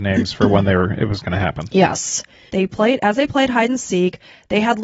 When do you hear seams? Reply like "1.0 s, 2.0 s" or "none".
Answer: 2.5 s